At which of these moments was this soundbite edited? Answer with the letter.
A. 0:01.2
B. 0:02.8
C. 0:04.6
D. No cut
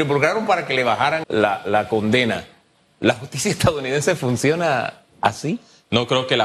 A